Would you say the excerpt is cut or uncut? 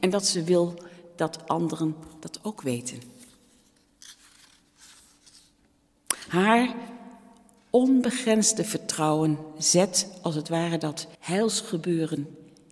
cut